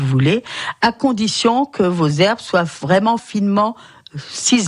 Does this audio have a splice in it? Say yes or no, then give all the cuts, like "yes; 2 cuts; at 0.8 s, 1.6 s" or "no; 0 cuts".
yes; 1 cut; at 3.2 s